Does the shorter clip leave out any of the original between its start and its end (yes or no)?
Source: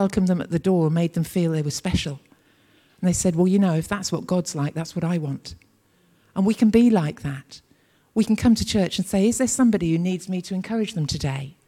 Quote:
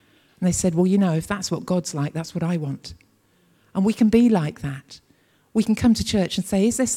no